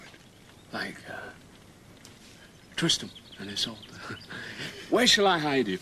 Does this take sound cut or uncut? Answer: uncut